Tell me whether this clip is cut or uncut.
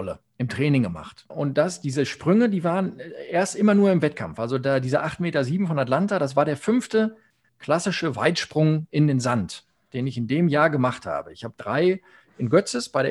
cut